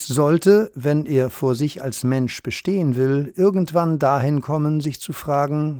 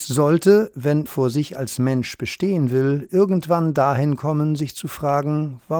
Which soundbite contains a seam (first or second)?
second